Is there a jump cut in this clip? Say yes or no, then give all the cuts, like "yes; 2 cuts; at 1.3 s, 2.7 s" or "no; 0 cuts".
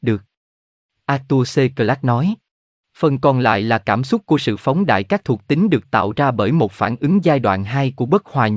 yes; 2 cuts; at 0.9 s, 2.7 s